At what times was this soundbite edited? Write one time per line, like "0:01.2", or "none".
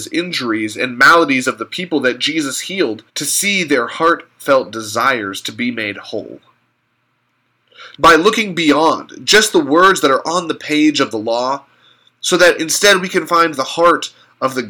0:03.1
0:08.0